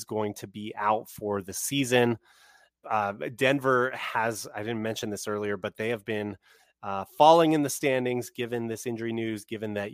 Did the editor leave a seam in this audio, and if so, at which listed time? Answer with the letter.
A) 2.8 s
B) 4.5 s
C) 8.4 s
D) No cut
A